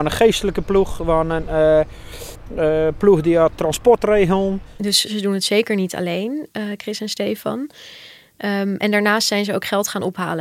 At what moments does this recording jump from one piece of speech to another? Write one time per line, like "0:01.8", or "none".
none